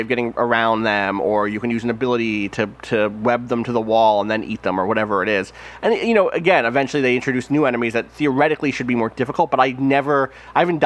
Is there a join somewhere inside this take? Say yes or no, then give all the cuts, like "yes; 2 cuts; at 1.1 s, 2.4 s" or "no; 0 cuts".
no; 0 cuts